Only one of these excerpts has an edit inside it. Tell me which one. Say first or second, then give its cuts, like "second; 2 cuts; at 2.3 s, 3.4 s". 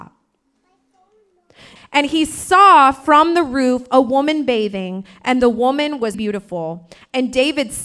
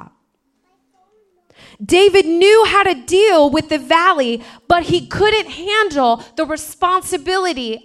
first; 2 cuts; at 1.8 s, 6.1 s